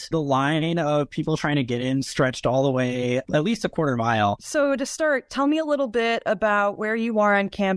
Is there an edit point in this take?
yes; 1 cut; at 4.4 s

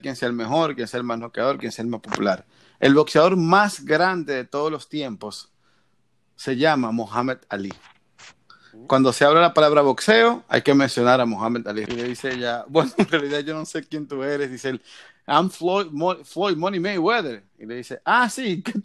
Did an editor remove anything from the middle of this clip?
yes; 1 cut; at 11.9 s

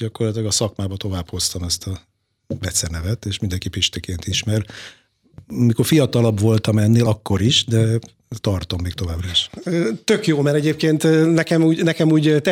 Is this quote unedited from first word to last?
yes; 0 cuts

